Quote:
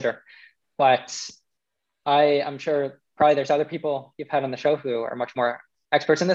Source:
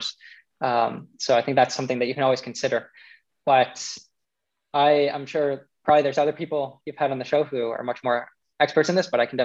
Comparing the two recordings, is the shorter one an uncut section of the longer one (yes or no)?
yes